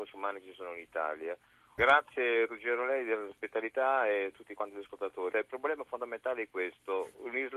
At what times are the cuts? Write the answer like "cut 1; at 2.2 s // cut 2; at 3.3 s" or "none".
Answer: cut 1; at 1.8 s // cut 2; at 5.3 s